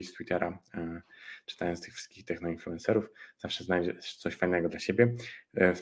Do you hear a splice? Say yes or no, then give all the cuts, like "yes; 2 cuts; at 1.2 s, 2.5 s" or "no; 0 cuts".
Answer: no; 0 cuts